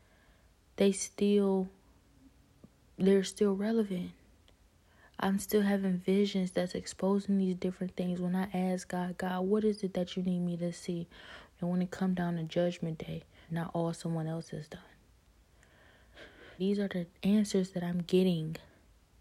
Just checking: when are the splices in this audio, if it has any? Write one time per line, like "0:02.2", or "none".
0:11.5
0:13.5
0:16.6